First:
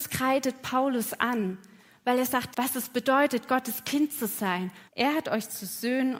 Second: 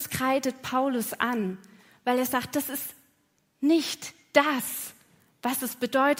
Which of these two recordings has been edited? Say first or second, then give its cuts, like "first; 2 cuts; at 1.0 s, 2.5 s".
first; 2 cuts; at 2.5 s, 4.9 s